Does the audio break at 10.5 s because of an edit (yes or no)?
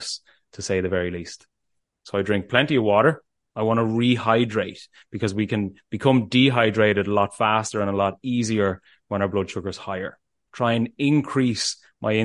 yes